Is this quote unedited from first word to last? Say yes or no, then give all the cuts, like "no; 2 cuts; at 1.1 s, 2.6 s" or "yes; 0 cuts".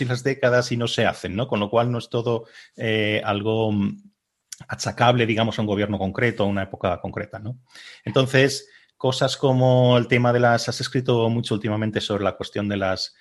yes; 0 cuts